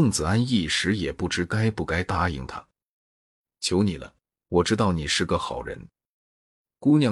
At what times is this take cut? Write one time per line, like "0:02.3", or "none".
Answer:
none